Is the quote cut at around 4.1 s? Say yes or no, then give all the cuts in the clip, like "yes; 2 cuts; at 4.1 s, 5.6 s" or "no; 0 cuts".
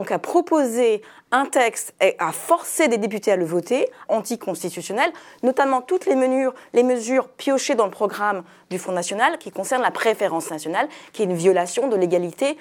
yes; 1 cut; at 4.1 s